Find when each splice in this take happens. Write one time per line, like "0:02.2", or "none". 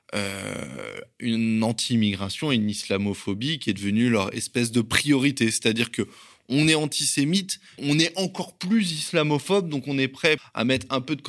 0:07.8
0:10.4